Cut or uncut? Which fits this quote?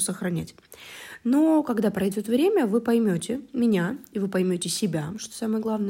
uncut